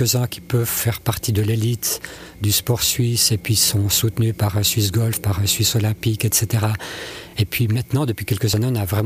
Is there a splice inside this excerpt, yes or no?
no